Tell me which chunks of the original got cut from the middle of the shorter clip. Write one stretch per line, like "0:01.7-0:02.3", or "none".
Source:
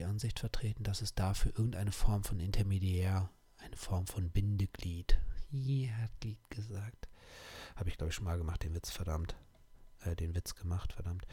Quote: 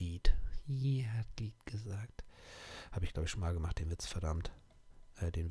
none